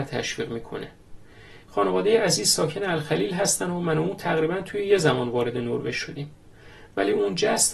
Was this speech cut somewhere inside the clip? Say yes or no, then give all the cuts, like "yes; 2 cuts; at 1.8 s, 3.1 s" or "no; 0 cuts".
yes; 1 cut; at 1.6 s